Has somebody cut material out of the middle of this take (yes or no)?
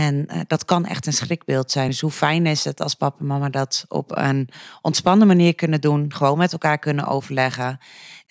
no